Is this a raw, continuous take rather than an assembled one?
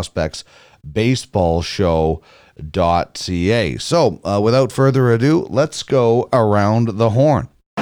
yes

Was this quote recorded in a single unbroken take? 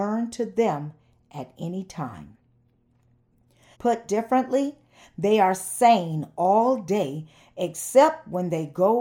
no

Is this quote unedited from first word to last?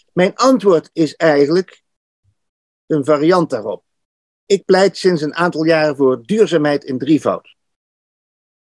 yes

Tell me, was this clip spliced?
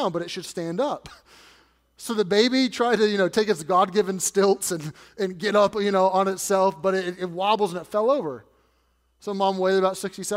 no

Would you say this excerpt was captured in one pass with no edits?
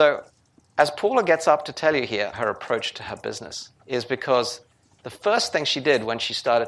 no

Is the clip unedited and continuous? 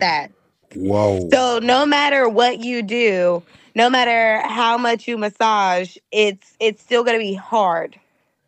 yes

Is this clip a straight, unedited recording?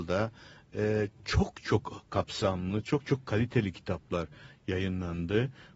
yes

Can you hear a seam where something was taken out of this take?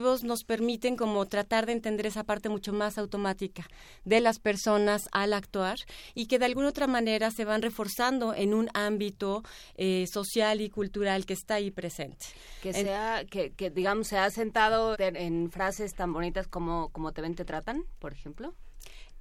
yes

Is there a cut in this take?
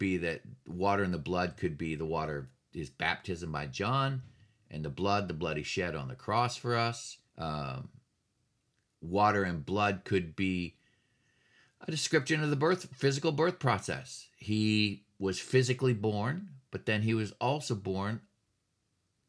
yes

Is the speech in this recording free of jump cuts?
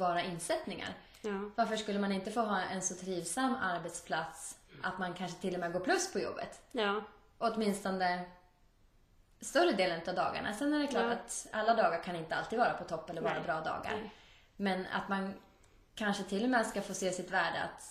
yes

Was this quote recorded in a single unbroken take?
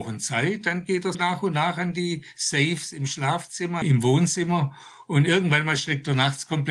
no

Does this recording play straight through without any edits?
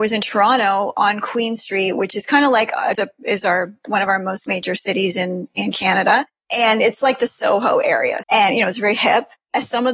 no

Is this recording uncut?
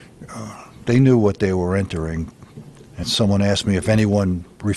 no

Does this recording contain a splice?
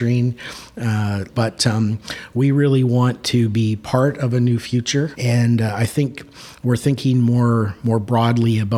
yes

